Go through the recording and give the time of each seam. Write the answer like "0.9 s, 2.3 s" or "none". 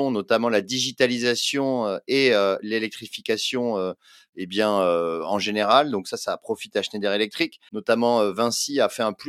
7.7 s